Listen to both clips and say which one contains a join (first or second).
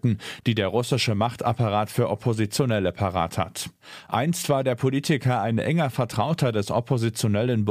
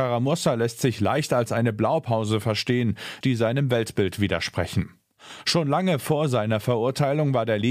second